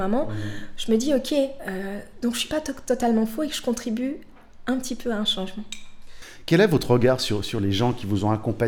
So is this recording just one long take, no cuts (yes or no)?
yes